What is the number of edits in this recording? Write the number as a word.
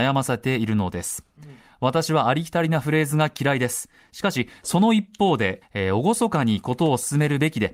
two